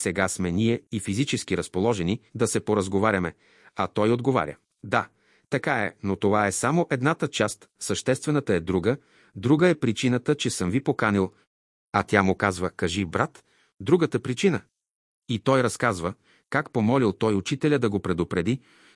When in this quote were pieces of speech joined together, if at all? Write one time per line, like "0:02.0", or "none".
0:02.3